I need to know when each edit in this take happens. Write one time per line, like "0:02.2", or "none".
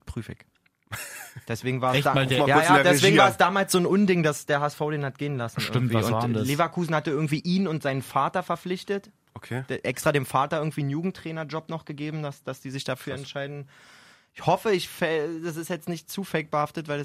none